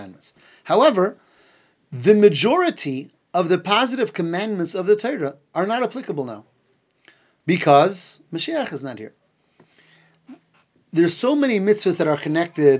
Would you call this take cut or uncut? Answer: uncut